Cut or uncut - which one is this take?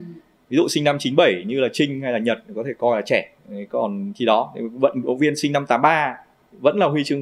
cut